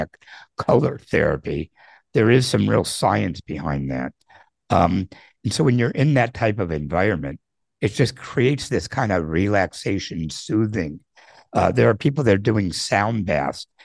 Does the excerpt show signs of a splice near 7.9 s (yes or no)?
no